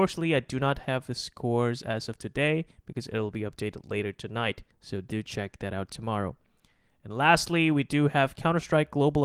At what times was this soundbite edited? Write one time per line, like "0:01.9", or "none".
0:04.7